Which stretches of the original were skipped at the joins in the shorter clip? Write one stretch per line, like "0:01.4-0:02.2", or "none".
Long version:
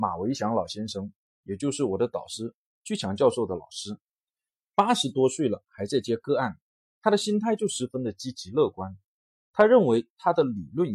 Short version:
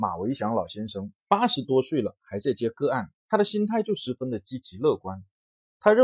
0:01.2-0:04.7
0:06.6-0:06.9